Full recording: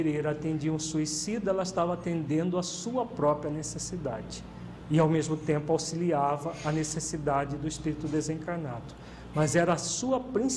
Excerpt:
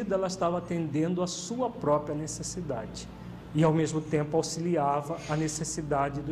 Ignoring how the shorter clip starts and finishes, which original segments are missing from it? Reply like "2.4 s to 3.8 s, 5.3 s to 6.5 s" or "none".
none